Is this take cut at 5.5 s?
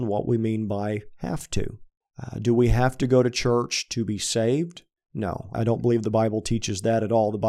yes; 1 cut; at 5.5 s

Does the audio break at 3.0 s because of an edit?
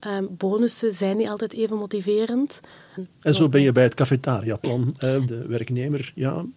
yes; 2 cuts; at 3.0 s, 5.3 s

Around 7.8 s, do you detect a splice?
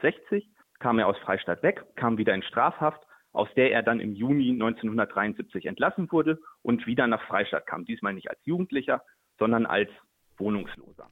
no; 1 cut; at 1.9 s

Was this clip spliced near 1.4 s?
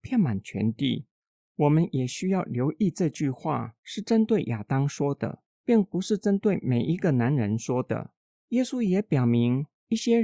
yes; 1 cut; at 1.4 s

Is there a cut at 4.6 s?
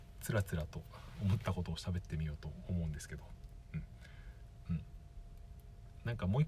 yes; 1 cut; at 4.6 s

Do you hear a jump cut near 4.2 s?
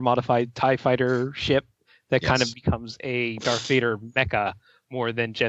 no; 1 cut; at 2.5 s

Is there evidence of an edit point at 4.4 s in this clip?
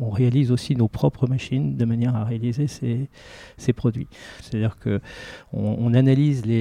yes; 1 cut; at 4.4 s

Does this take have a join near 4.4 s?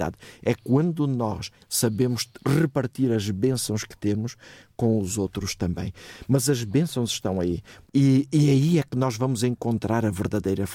no; 2 cuts; at 1.6 s, 7.9 s

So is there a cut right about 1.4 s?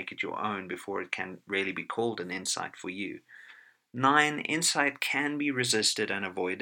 no; 0 cuts

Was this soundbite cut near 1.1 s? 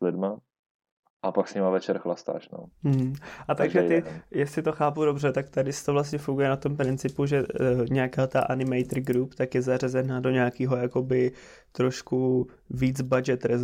yes; 2 cuts; at 1.1 s, 2.7 s

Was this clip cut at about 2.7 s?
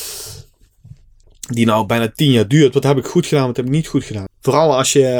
no; 2 cuts; at 1.2 s, 4.3 s

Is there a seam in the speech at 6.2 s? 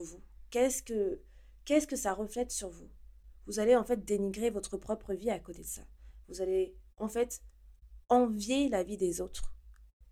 no; 0 cuts

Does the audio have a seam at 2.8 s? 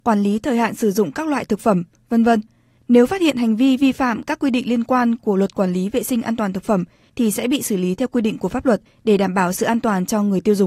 yes; 1 cut; at 2.8 s

